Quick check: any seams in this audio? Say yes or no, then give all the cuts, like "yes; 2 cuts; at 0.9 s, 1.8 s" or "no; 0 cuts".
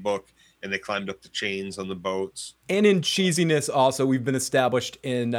no; 0 cuts